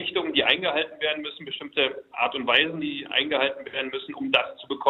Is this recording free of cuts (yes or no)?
yes